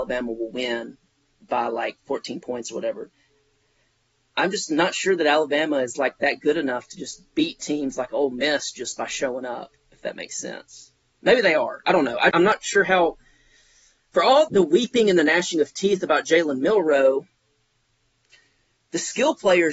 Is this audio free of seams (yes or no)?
no